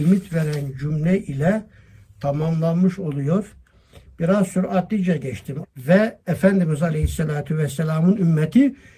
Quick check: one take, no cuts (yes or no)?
no